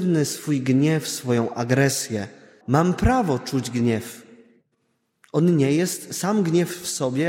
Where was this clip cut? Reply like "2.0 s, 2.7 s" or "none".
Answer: 2.6 s

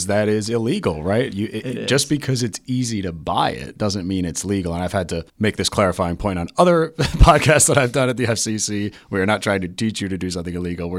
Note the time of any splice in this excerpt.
5.3 s

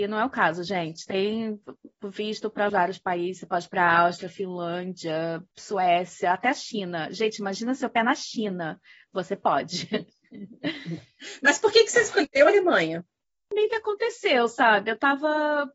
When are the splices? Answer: 2.7 s, 5.5 s

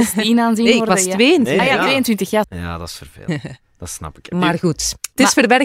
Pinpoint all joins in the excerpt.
2.4 s

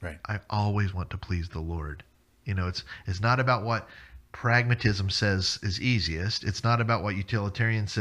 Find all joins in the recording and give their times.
none

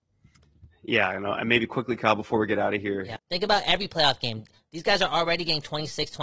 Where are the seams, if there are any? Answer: 3.2 s

